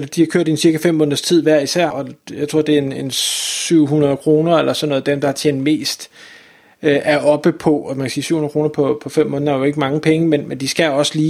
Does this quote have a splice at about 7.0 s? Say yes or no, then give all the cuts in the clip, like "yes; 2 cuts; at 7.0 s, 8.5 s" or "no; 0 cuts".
no; 1 cut; at 1.9 s